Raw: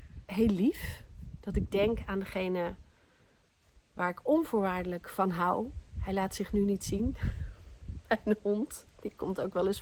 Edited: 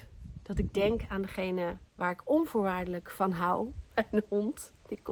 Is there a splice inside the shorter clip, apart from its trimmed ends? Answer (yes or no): yes